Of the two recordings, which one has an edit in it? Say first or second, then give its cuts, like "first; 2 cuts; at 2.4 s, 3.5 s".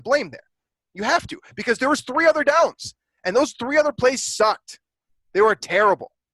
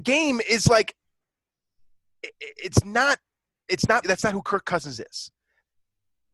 second; 1 cut; at 4.0 s